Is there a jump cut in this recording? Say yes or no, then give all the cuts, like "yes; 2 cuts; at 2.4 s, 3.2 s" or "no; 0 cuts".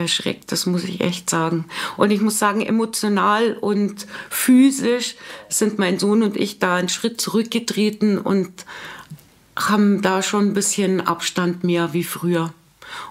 no; 0 cuts